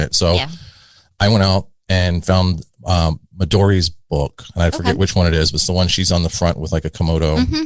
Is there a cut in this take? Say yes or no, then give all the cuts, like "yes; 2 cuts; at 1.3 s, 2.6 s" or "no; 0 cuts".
no; 0 cuts